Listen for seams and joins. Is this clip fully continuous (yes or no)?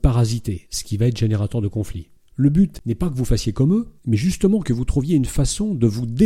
no